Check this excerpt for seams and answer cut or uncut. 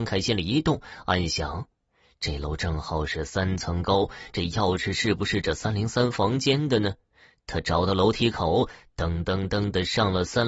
uncut